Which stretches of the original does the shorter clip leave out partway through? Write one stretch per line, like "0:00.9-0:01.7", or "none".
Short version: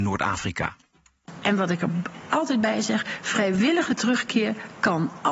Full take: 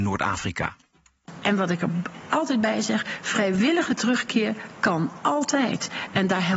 none